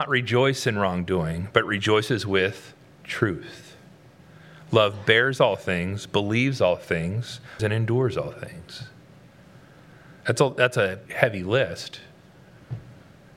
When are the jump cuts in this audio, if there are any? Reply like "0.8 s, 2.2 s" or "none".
7.6 s, 11.1 s